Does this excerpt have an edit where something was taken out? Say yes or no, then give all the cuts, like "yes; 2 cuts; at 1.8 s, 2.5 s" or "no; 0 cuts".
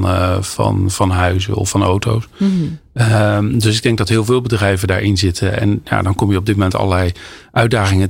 no; 0 cuts